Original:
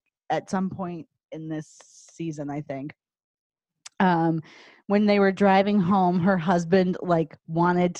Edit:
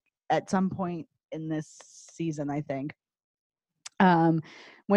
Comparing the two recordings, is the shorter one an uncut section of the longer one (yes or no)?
yes